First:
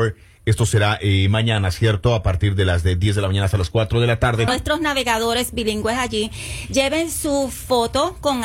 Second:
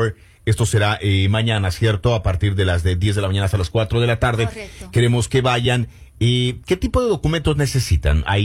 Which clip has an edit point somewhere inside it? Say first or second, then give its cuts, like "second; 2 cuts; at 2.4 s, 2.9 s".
first; 1 cut; at 4.5 s